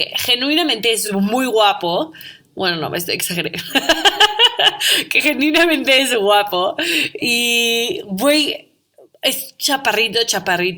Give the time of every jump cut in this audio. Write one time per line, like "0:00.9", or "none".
none